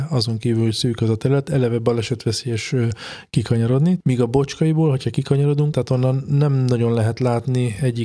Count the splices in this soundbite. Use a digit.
2